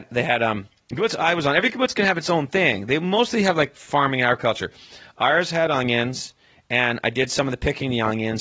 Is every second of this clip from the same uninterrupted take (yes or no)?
yes